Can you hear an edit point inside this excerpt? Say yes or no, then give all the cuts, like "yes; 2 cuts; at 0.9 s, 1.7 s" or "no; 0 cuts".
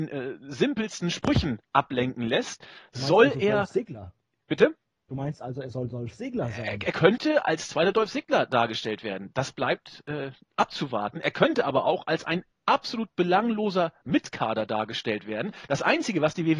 no; 0 cuts